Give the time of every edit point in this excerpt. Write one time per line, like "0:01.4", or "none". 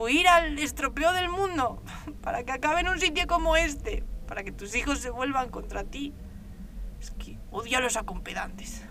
none